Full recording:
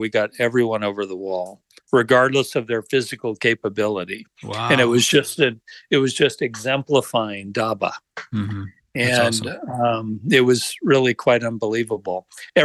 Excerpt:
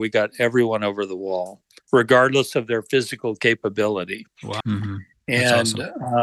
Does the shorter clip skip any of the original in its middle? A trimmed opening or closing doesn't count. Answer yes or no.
yes